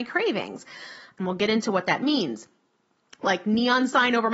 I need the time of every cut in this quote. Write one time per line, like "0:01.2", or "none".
0:01.1
0:03.2